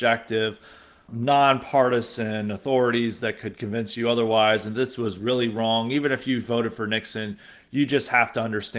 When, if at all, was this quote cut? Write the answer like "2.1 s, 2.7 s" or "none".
1.1 s

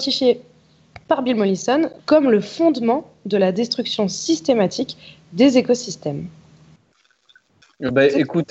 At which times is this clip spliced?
2.0 s

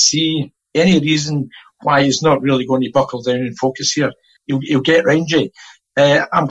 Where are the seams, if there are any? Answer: 4.4 s

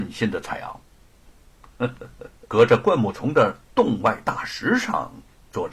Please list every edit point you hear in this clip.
1.3 s, 2.4 s

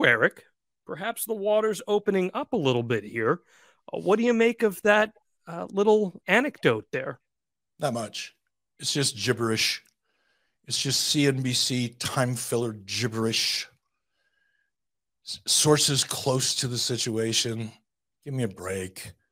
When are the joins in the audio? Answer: none

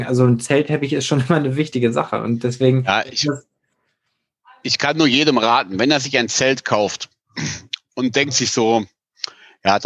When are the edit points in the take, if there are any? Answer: none

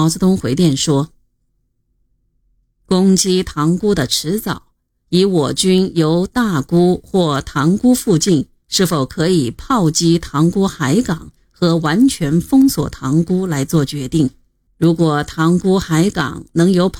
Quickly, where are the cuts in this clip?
14.7 s

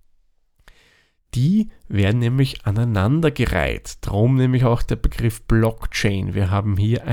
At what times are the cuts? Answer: none

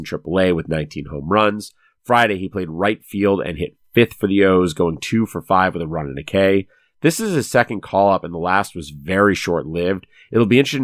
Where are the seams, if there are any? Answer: none

